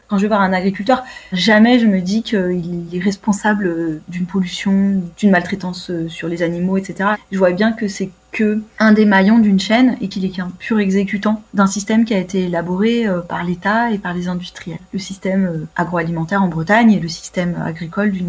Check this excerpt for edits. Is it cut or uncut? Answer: uncut